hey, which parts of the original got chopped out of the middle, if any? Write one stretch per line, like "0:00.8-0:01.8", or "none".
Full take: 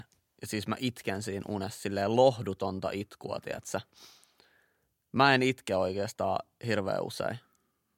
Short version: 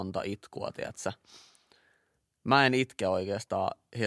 none